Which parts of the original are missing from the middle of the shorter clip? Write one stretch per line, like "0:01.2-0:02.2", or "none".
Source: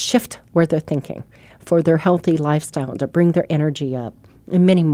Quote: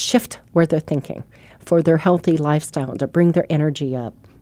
none